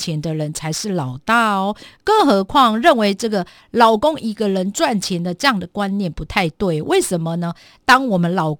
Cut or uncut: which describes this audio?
uncut